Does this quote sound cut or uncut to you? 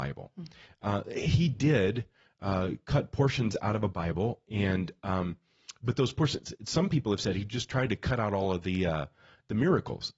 uncut